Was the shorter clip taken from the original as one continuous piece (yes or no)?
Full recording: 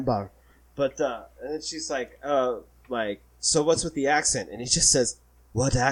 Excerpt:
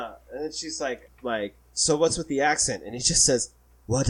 no